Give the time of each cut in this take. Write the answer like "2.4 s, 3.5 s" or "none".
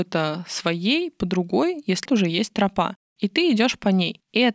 2.1 s